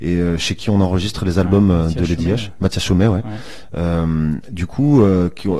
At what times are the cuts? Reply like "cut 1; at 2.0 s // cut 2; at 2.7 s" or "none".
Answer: none